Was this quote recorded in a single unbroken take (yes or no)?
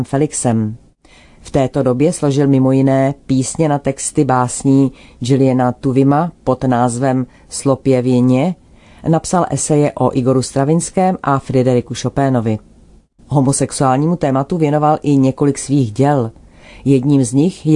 no